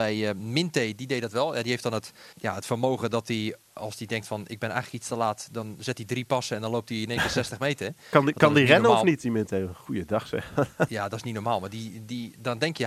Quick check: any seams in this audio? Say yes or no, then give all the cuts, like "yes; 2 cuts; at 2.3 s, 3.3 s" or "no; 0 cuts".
yes; 1 cut; at 2.3 s